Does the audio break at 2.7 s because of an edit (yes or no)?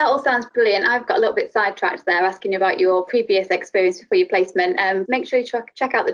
no